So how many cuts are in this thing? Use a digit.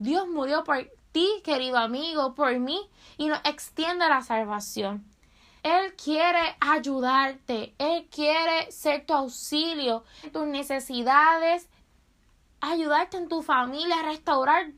2